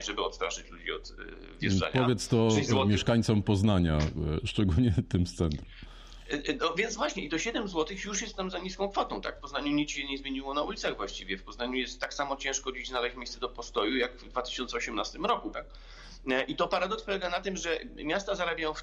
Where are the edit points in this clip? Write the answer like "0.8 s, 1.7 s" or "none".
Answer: 15.5 s